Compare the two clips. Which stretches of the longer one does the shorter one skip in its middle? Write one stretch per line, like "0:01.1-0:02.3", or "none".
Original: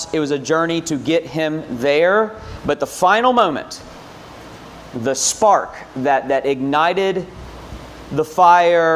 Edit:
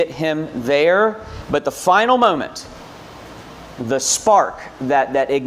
none